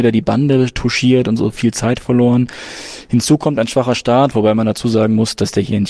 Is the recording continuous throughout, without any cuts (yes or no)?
yes